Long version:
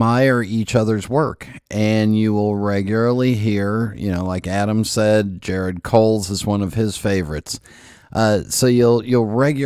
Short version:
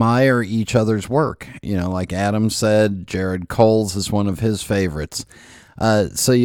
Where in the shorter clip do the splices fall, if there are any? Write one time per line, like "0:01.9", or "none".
0:01.6